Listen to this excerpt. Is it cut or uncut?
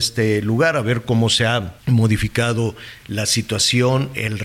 cut